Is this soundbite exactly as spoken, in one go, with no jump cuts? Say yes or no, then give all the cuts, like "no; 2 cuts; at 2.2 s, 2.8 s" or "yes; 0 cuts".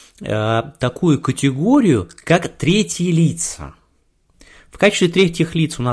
yes; 0 cuts